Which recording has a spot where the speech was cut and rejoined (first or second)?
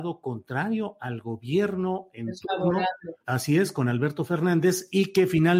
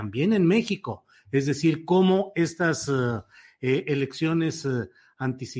first